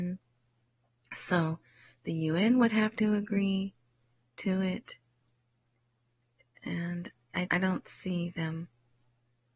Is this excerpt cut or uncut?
cut